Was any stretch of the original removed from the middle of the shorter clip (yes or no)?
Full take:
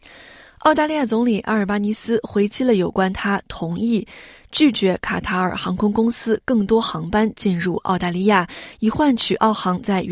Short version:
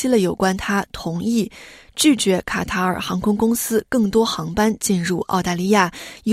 no